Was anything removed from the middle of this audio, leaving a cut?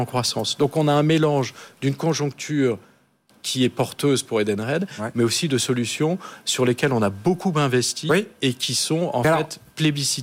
no; 0 cuts

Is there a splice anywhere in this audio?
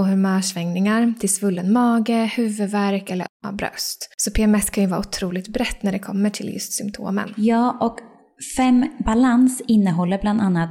no; 0 cuts

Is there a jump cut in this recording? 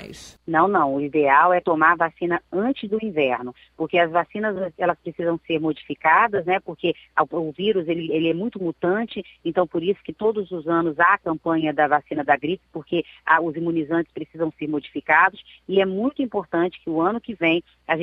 no; 0 cuts

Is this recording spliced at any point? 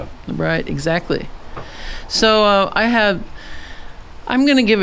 no; 0 cuts

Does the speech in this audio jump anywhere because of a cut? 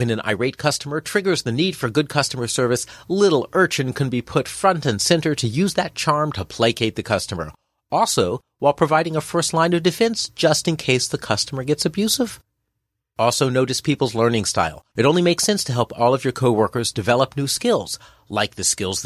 yes; 1 cut; at 14.9 s

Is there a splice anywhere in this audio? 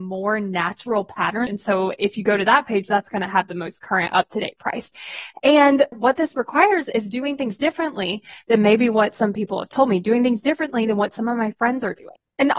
yes; 1 cut; at 1.5 s

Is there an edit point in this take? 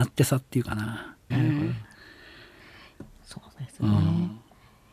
yes; 1 cut; at 1.3 s

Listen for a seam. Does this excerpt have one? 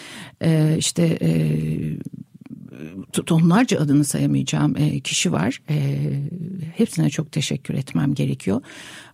no; 0 cuts

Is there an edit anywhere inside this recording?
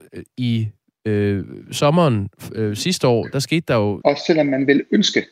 yes; 1 cut; at 4.0 s

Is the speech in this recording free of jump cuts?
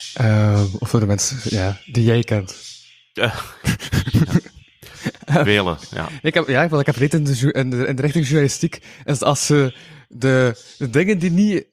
yes; 0 cuts

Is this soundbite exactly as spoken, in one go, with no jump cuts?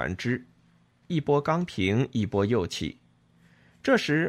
no; 1 cut; at 1.1 s

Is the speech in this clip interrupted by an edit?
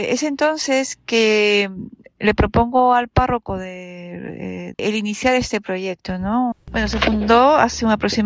yes; 2 cuts; at 4.7 s, 6.5 s

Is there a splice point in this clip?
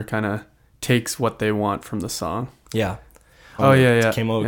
yes; 1 cut; at 3.6 s

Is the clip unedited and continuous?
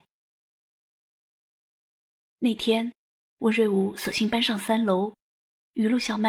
yes; 0 cuts

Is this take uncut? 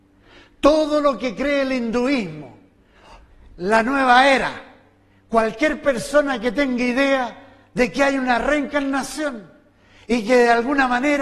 yes; 0 cuts

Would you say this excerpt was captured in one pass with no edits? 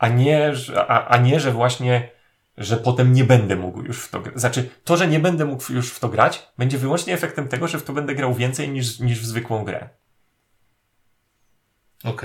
yes; 0 cuts

